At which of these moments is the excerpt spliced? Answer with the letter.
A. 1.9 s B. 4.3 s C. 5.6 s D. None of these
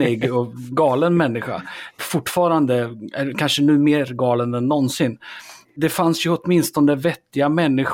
D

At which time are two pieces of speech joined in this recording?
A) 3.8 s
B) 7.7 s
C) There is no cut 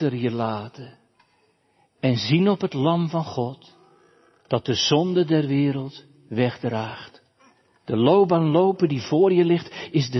B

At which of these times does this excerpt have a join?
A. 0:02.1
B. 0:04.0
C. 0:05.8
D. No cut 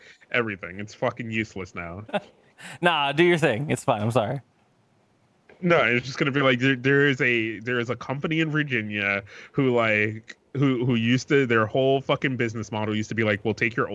A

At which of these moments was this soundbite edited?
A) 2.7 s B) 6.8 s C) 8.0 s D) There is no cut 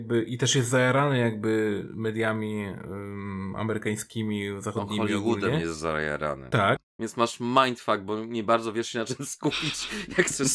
B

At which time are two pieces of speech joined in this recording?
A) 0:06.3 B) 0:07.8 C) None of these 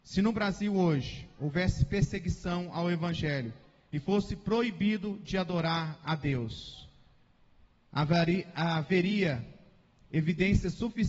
C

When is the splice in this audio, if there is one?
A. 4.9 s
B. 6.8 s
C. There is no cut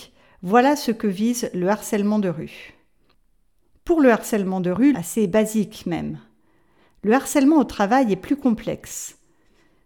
A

